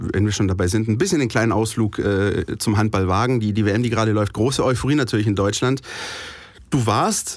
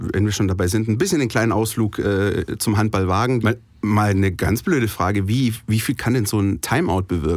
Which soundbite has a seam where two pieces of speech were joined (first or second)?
second